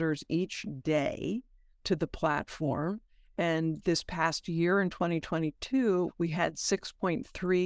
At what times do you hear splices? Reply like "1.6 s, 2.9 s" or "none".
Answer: 6.1 s